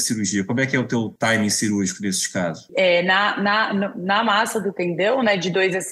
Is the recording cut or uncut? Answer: cut